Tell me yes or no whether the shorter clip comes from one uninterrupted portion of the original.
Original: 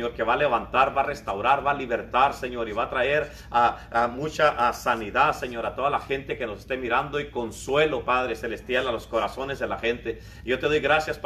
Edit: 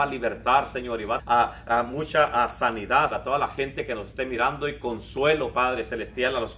no